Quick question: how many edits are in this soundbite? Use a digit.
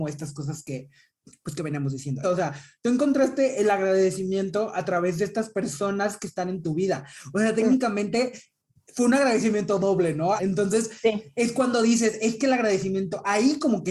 2